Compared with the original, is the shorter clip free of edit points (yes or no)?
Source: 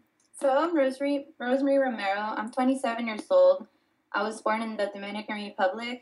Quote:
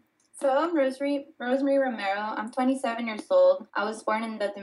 no